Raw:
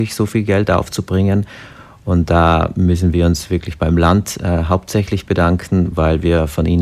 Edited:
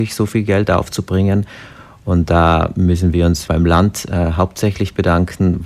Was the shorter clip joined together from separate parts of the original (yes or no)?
yes